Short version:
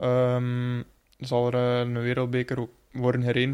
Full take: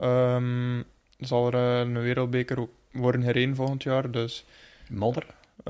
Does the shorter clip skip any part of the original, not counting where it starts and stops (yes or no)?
no